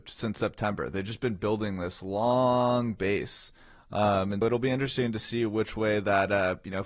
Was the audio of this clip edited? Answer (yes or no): yes